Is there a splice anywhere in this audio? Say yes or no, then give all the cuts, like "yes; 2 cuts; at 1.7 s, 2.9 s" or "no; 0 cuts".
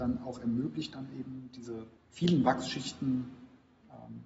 yes; 1 cut; at 2.0 s